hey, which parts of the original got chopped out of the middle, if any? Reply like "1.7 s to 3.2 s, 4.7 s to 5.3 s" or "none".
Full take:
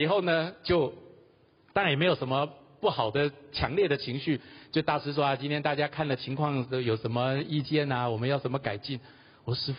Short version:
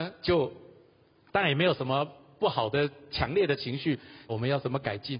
4.7 s to 8.1 s